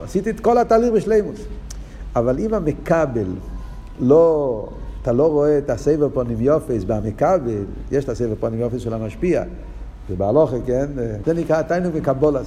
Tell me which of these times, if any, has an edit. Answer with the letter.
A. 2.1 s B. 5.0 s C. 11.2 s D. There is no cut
C